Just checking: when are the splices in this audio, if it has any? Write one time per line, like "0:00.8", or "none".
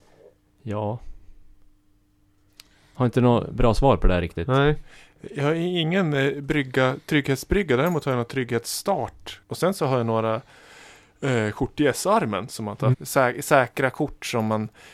0:09.4
0:12.9